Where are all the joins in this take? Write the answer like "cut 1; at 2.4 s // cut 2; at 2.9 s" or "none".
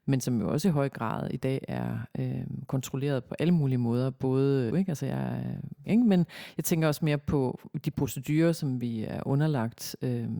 cut 1; at 4.7 s // cut 2; at 5.8 s